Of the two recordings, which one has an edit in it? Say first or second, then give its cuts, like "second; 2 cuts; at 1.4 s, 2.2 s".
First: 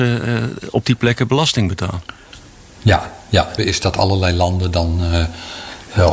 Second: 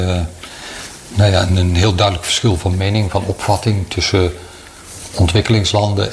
first; 1 cut; at 3.6 s